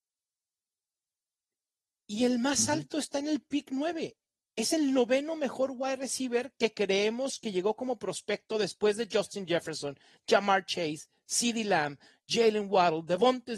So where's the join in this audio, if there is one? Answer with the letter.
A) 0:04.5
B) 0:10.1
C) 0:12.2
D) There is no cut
D